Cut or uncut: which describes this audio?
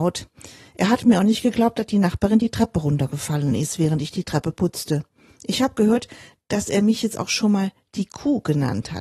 cut